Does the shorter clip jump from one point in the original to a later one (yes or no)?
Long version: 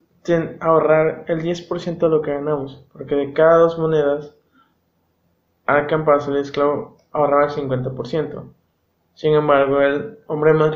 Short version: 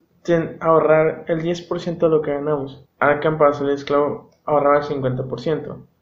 yes